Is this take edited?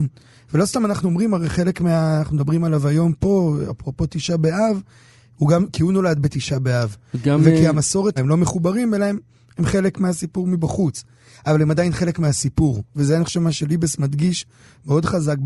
yes; 1 cut; at 8.2 s

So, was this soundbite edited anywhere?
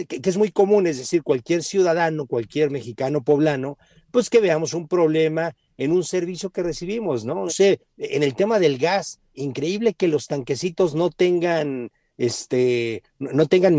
yes; 2 cuts; at 7.5 s, 9.3 s

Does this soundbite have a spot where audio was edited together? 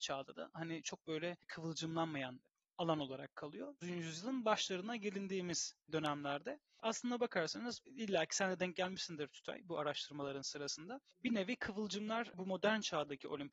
yes; 1 cut; at 3.8 s

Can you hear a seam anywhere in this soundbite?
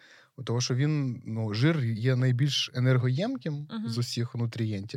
no; 0 cuts

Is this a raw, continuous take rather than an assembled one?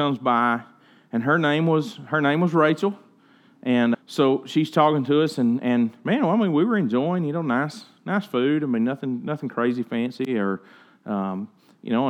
no; 1 cut; at 3.9 s

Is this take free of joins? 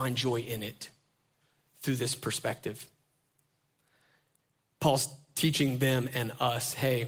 yes; 0 cuts

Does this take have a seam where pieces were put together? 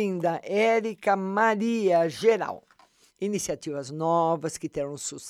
yes; 1 cut; at 3.1 s

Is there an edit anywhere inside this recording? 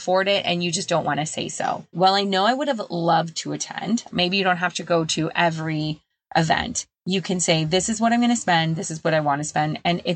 yes; 2 cuts; at 1.9 s, 4.1 s

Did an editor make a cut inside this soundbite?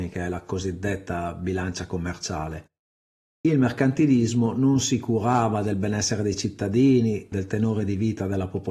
yes; 1 cut; at 7.3 s

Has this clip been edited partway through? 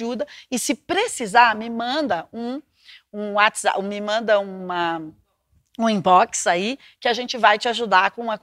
no; 0 cuts

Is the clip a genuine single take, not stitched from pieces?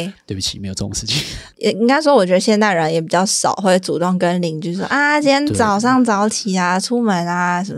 yes; 0 cuts

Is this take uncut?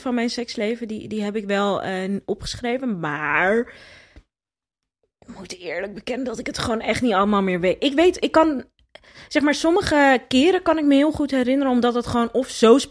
yes; 0 cuts

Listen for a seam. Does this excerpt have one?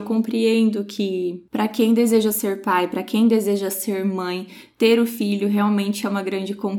no; 0 cuts

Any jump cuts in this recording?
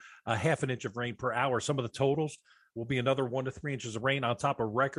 no; 0 cuts

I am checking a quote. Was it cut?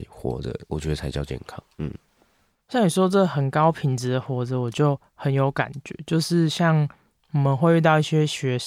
no; 0 cuts

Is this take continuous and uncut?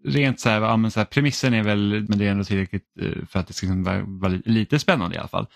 no; 1 cut; at 2.1 s

